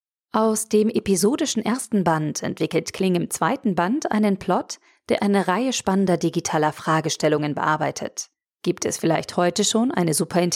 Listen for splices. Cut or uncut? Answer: cut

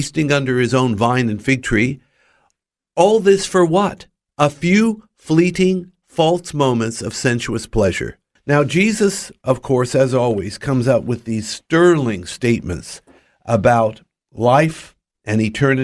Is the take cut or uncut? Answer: cut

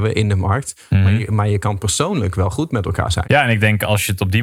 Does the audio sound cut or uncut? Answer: cut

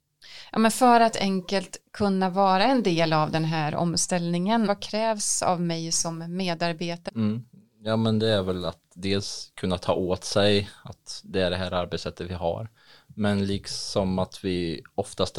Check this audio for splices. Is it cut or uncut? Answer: cut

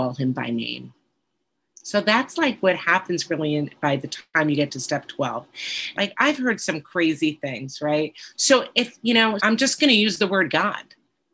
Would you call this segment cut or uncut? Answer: cut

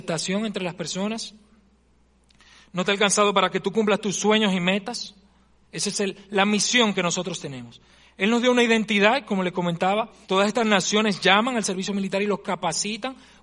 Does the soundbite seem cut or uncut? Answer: cut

